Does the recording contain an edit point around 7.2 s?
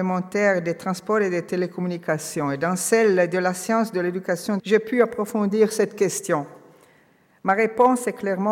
no; 1 cut; at 4.6 s

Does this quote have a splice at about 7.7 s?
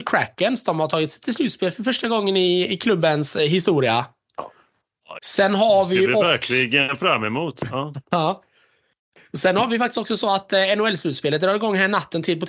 no; 1 cut; at 5.2 s

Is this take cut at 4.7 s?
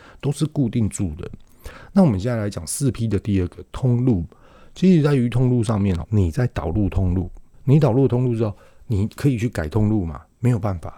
no; 2 cuts; at 6.0 s, 7.5 s

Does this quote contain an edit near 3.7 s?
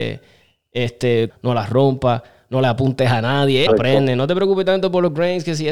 yes; 2 cuts; at 1.3 s, 3.7 s

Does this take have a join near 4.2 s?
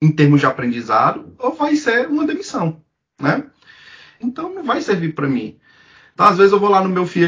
yes; 1 cut; at 4.2 s

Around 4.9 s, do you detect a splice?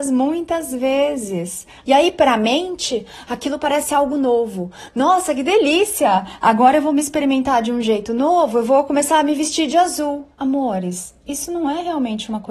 no; 2 cuts; at 1.8 s, 10.3 s

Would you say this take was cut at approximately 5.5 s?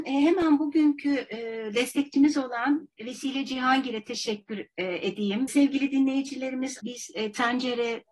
yes; 2 cuts; at 5.5 s, 6.8 s

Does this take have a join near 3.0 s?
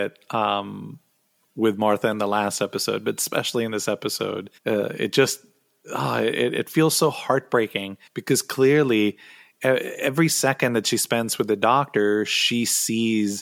no; 2 cuts; at 4.6 s, 8.1 s

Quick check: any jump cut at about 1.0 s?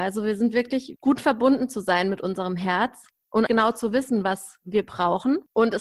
yes; 2 cuts; at 1.0 s, 3.5 s

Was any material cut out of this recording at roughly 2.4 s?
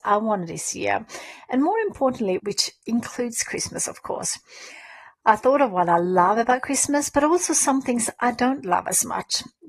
yes; 1 cut; at 2.4 s

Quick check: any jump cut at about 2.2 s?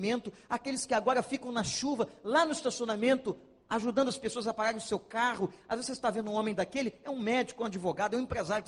no; 0 cuts

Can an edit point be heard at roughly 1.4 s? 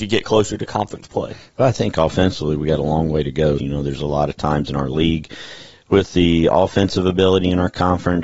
no; 1 cut; at 3.6 s

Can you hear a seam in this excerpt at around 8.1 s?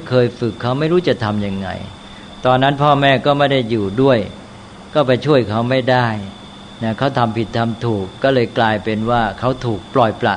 no; 0 cuts

